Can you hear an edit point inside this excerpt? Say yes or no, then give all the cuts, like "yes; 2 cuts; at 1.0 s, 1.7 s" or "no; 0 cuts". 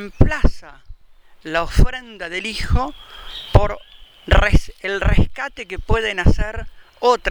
no; 0 cuts